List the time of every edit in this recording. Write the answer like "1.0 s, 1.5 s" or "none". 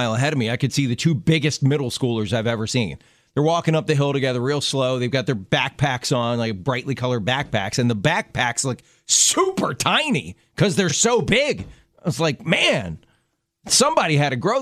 none